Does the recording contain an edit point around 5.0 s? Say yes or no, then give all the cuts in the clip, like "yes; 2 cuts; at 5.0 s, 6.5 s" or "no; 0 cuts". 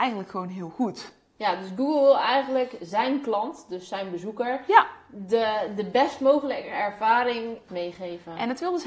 no; 0 cuts